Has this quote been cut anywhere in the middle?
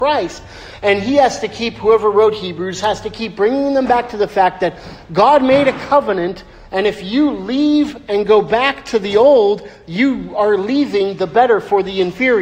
no; 0 cuts

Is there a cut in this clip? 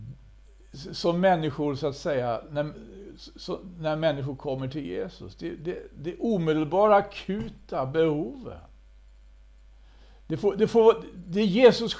no; 0 cuts

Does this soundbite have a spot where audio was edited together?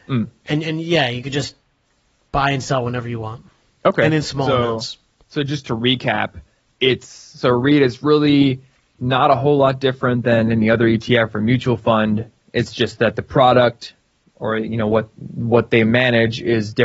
no; 0 cuts

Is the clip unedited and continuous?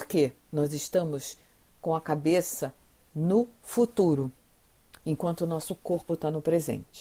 yes; 0 cuts

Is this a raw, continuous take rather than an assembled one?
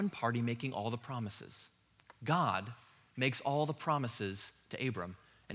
yes; 0 cuts

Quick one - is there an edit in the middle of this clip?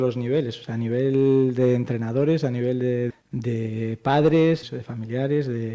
yes; 2 cuts; at 3.1 s, 4.6 s

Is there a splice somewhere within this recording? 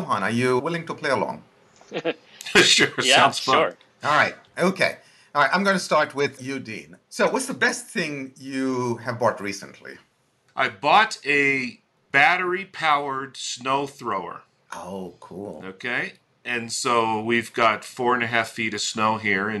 no; 0 cuts

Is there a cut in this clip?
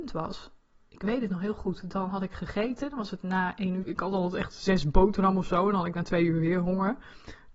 yes; 1 cut; at 3.8 s

